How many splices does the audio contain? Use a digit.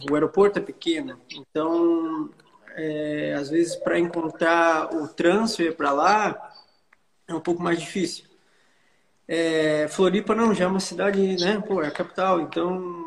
0